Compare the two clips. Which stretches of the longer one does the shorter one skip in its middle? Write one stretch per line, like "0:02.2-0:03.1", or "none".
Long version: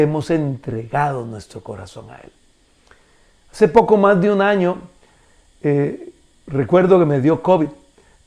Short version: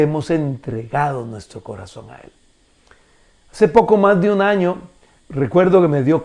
0:05.2-0:06.3